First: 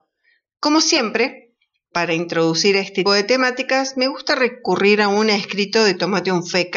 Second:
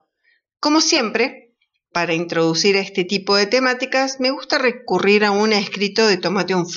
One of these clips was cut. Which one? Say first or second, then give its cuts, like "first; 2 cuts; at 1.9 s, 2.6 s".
first; 1 cut; at 3.1 s